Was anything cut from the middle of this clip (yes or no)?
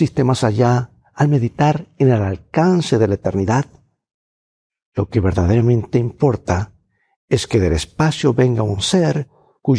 no